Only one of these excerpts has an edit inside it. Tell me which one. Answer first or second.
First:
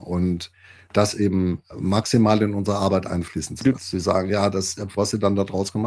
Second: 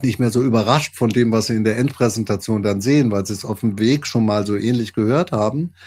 first